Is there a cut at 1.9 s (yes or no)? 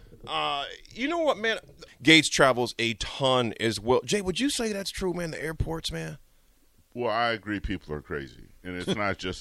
yes